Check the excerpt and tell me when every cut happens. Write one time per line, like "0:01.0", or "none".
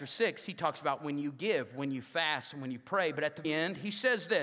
0:03.4